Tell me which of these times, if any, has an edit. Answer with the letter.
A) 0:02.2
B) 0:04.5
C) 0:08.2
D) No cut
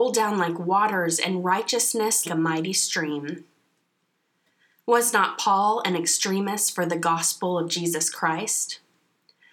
A